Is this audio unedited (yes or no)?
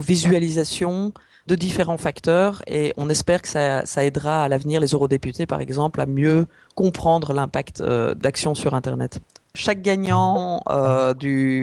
yes